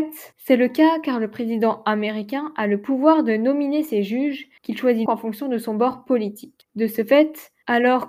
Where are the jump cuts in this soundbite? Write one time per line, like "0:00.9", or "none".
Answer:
0:05.1
0:06.7